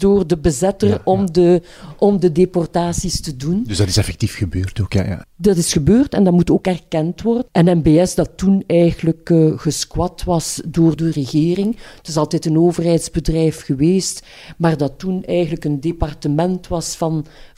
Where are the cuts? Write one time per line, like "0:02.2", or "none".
0:05.2
0:07.5
0:11.0